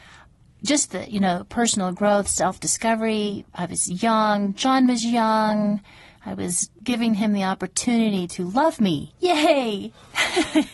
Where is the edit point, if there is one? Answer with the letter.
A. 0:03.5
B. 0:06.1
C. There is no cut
A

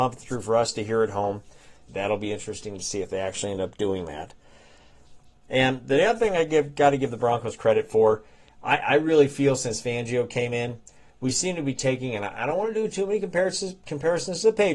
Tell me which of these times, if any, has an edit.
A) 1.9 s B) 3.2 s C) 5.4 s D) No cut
A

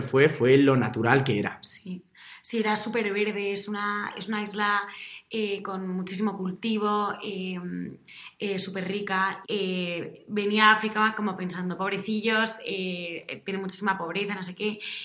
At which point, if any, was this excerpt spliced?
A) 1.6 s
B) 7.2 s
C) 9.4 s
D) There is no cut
C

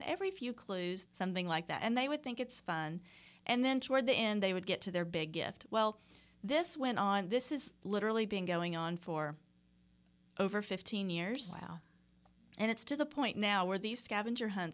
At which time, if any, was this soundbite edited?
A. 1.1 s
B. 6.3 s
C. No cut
A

